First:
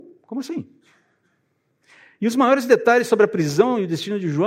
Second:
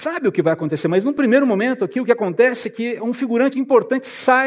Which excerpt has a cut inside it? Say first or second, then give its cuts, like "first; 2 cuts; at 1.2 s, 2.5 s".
second; 1 cut; at 3.5 s